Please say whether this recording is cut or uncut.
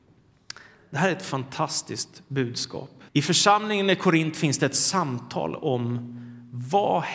cut